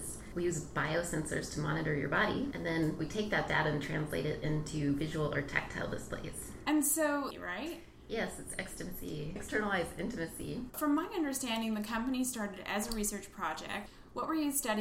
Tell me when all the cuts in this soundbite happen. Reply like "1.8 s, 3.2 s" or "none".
7.3 s, 10.7 s